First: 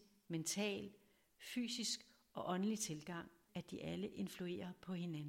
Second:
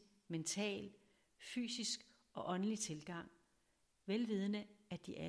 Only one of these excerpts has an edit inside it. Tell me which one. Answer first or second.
first